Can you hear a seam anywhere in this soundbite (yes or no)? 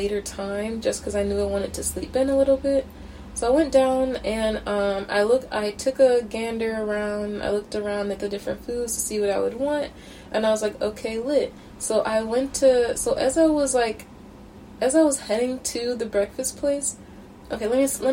no